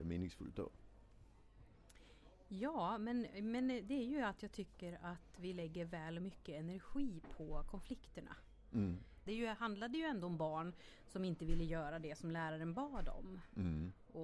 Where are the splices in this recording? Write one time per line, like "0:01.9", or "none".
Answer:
0:09.3